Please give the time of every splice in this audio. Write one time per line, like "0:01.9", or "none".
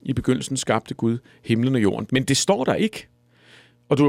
0:02.1